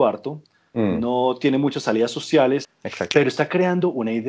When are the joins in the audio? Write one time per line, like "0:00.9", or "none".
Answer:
0:02.6